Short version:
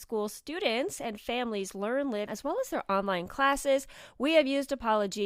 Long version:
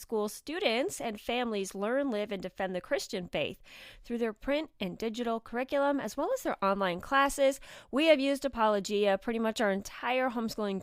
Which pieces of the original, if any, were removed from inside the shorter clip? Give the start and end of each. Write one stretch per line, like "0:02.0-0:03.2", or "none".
0:02.3-0:06.0